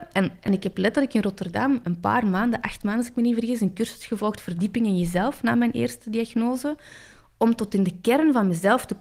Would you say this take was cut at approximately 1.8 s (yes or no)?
yes